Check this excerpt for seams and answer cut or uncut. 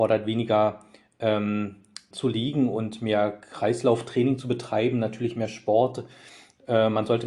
cut